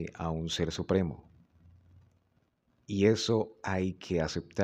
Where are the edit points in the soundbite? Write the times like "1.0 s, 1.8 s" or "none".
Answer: none